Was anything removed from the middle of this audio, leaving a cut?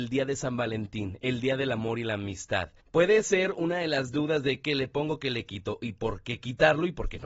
yes; 1 cut; at 2.8 s

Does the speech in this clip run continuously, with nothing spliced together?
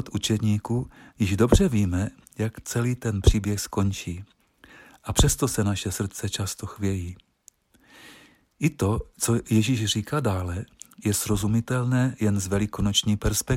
yes; 0 cuts

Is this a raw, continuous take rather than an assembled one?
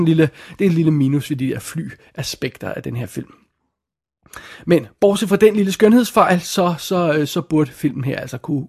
yes; 0 cuts

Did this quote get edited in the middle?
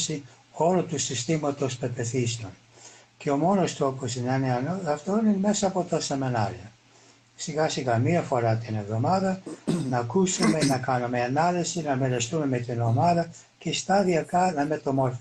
no; 0 cuts

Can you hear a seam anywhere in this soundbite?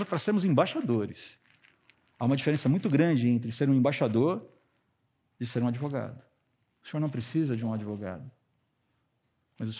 no; 0 cuts

